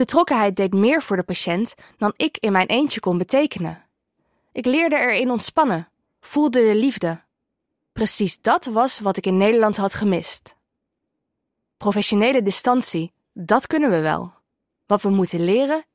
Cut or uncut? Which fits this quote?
uncut